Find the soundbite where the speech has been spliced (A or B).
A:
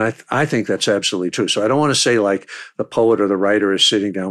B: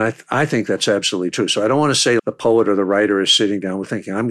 B